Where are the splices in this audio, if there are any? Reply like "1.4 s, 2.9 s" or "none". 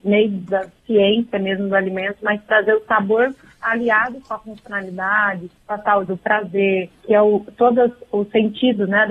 6.1 s